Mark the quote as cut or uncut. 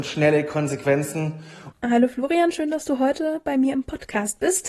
cut